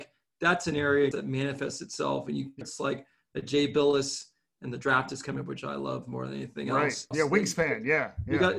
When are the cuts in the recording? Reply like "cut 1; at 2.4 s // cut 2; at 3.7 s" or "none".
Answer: cut 1; at 1.1 s // cut 2; at 2.6 s // cut 3; at 7.1 s

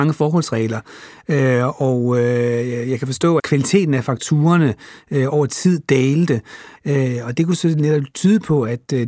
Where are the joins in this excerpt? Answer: cut 1; at 3.4 s // cut 2; at 6.8 s

